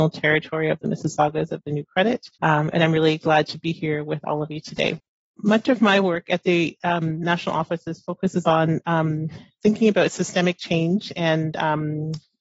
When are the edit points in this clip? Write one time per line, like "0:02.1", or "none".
0:02.3